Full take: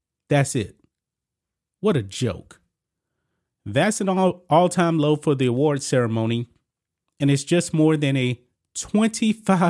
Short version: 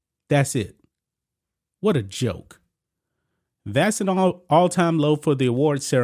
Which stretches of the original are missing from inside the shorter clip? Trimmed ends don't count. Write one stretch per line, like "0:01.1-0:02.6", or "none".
none